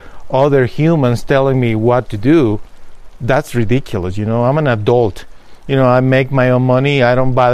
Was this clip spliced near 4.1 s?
no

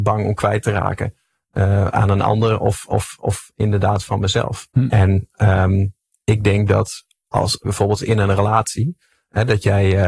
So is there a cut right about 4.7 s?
yes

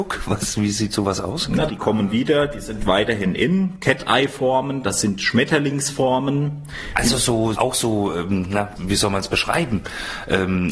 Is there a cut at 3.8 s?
no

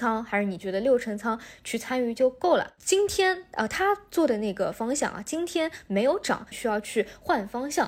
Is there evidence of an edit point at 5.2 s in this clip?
no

